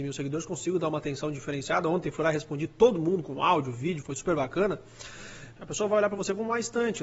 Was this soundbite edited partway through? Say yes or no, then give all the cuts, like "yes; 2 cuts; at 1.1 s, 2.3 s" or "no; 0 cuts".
yes; 2 cuts; at 4.0 s, 5.6 s